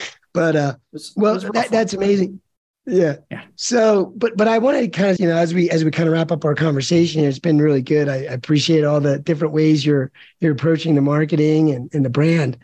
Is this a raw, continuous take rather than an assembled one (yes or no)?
no